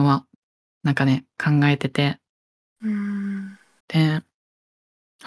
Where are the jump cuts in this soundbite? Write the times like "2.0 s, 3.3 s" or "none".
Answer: 3.8 s